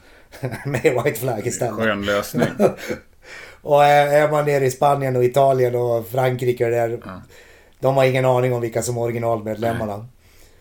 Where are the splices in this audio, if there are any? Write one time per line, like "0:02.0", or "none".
none